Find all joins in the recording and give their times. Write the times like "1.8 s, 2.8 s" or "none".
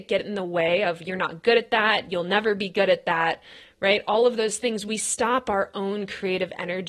none